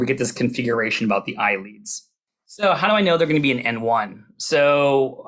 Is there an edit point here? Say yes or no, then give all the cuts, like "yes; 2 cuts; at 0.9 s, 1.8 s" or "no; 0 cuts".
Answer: no; 0 cuts